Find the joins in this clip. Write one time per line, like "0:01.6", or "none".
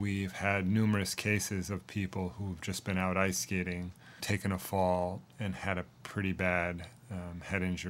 0:04.2